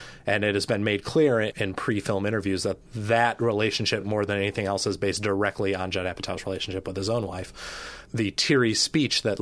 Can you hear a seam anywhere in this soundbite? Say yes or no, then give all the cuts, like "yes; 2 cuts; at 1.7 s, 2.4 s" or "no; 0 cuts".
no; 0 cuts